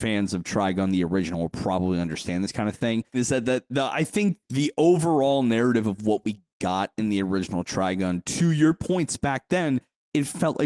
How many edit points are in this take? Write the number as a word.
two